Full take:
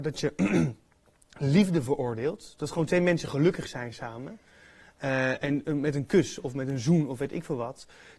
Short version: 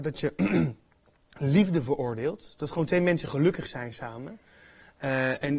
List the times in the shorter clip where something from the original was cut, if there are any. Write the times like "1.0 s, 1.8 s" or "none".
none